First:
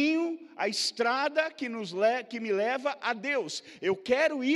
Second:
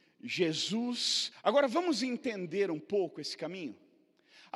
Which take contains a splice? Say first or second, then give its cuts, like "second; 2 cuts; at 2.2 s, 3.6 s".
second; 1 cut; at 1.3 s